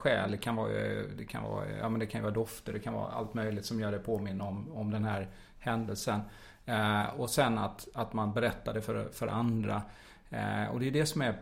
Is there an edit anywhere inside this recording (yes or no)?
no